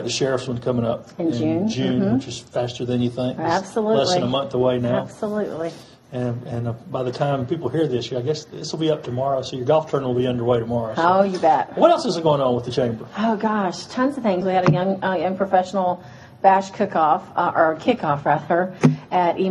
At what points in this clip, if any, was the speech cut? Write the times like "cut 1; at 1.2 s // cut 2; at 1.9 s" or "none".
cut 1; at 14.4 s